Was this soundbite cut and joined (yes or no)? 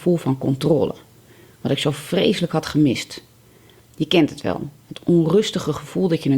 no